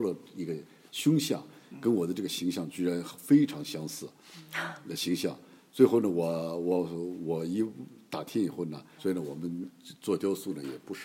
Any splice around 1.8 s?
no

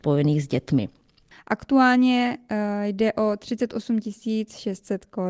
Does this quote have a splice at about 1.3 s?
yes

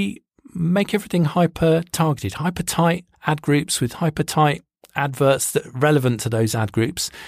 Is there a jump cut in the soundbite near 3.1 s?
yes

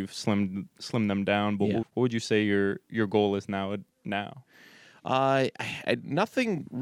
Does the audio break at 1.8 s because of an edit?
yes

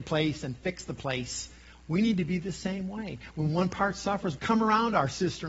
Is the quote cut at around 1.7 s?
no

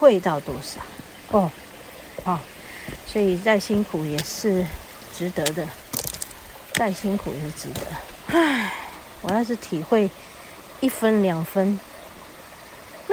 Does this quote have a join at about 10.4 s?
no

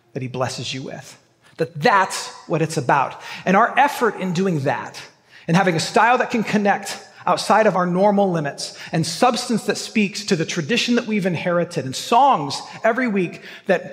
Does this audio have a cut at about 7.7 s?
yes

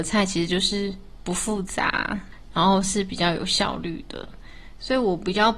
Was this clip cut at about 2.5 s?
yes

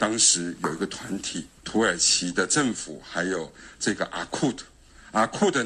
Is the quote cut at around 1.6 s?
yes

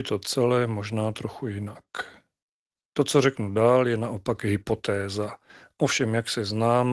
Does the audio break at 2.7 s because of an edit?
yes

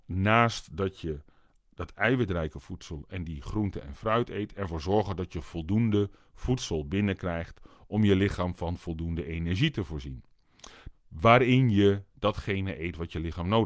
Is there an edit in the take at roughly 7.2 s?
no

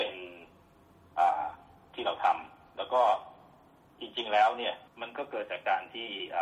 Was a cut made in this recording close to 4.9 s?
yes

